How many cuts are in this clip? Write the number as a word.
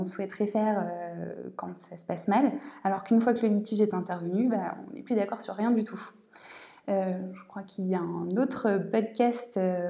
zero